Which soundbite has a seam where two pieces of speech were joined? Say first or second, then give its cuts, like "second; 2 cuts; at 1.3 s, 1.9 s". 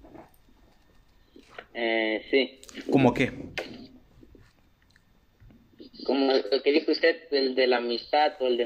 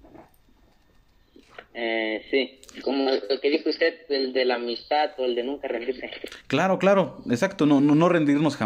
second; 1 cut; at 2.8 s